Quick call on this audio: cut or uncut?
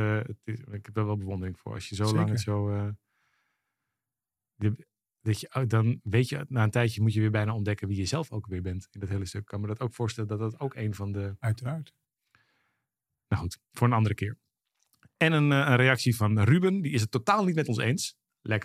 uncut